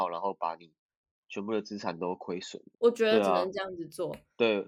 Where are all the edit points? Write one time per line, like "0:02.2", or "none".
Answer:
0:02.7